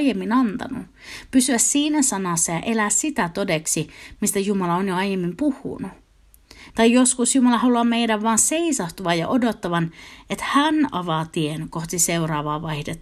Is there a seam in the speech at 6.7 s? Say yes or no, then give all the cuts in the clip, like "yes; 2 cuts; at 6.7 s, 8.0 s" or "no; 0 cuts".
yes; 1 cut; at 6.7 s